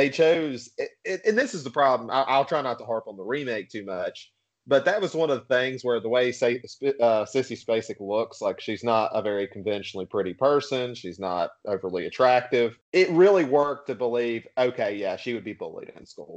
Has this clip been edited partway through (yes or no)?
no